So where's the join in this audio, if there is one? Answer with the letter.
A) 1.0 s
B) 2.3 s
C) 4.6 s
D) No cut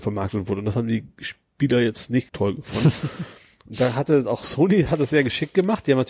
B